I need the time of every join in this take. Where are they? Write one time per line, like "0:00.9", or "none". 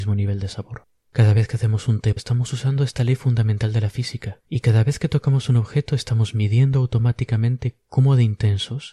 0:02.2
0:04.5